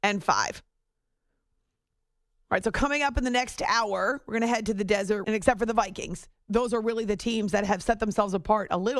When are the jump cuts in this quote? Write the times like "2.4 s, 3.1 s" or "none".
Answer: 5.2 s